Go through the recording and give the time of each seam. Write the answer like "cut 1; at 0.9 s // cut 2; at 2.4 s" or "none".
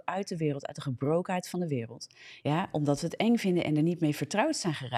cut 1; at 2.4 s